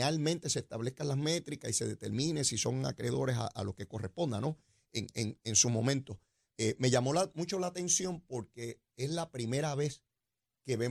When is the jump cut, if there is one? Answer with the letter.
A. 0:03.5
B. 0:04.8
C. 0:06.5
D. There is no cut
C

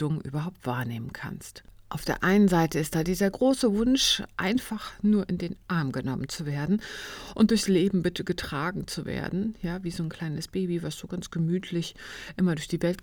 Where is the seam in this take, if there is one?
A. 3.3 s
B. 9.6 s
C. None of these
A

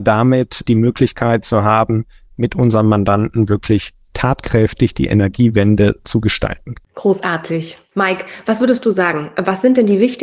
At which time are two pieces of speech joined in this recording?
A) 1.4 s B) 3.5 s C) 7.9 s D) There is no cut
C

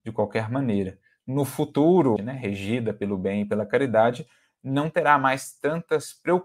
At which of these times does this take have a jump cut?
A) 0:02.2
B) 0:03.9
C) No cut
A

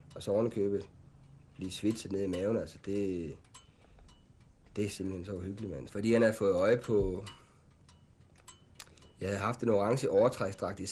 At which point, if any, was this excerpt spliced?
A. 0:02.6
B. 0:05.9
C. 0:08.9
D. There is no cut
B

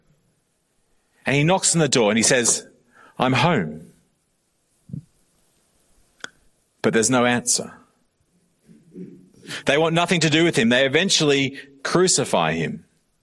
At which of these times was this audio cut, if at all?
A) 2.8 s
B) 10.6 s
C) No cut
B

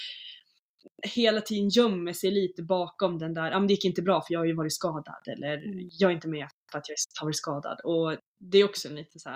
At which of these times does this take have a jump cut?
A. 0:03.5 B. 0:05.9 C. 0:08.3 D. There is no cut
C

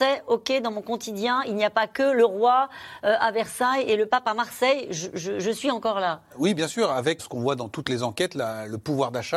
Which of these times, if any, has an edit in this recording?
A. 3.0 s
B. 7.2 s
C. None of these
B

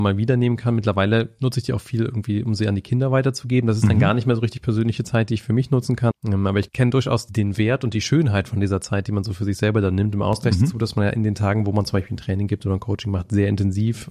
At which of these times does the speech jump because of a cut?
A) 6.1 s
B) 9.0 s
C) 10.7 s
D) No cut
A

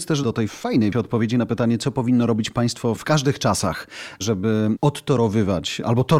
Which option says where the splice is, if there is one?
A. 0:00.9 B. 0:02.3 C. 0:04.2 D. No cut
A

